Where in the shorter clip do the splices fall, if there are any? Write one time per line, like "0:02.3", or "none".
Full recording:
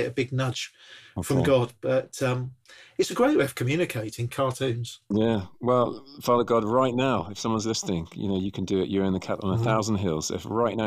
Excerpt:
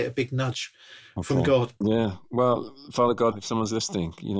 0:01.8
0:03.3